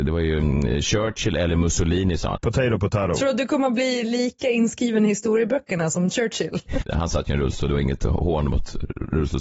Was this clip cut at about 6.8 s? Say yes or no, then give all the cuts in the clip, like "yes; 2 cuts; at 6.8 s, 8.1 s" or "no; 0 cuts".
yes; 2 cuts; at 2.4 s, 6.8 s